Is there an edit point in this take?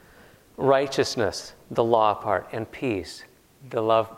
no; 0 cuts

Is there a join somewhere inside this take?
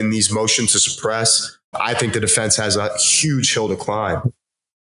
yes; 1 cut; at 1.7 s

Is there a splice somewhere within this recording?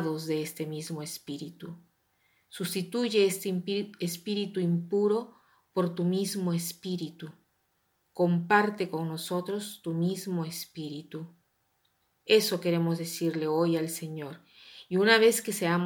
no; 0 cuts

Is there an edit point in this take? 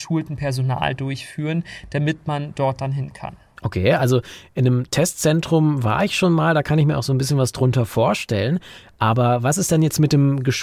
no; 0 cuts

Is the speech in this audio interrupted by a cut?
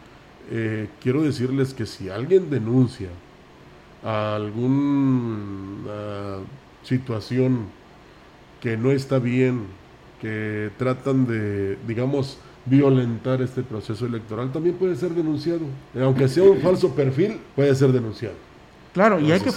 yes; 2 cuts; at 15.9 s, 17.5 s

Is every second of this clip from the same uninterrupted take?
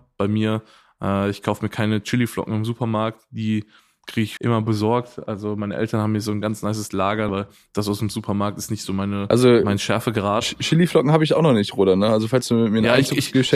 no; 2 cuts; at 4.4 s, 7.3 s

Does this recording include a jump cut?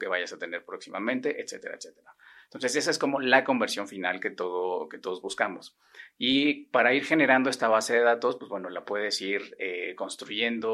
no; 0 cuts

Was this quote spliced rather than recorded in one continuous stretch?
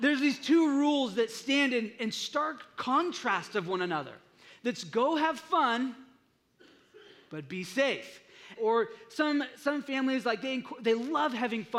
yes; 1 cut; at 8.6 s

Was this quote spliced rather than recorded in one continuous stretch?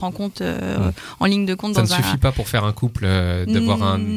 no; 0 cuts

